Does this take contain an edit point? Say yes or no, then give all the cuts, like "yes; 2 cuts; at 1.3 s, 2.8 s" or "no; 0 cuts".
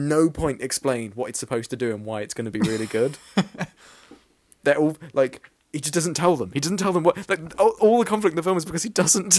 no; 0 cuts